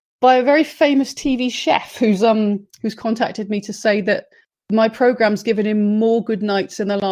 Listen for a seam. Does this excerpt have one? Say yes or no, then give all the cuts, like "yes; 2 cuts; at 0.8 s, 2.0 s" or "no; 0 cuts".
no; 0 cuts